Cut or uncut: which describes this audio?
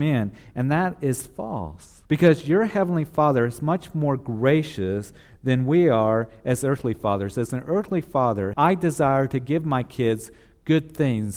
cut